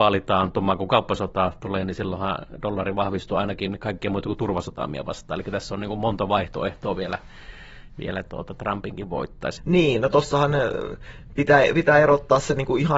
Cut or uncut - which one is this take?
cut